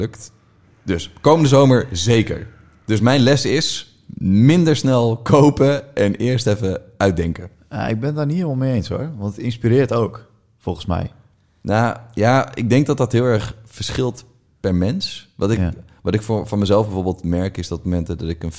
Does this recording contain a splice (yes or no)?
no